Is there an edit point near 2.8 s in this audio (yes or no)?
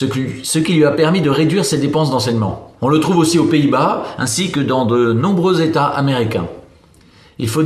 yes